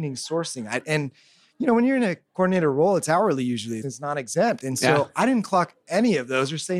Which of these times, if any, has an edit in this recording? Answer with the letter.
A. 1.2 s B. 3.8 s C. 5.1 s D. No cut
B